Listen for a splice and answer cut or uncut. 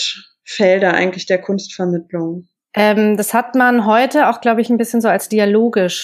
cut